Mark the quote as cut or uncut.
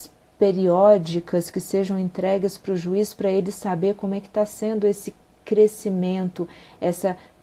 uncut